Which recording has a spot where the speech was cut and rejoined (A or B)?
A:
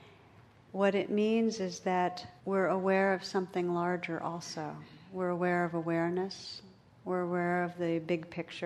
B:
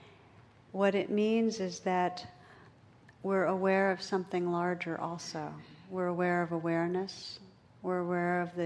A